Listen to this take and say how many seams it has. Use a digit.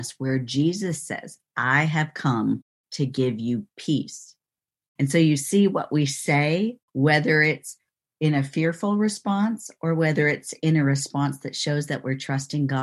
2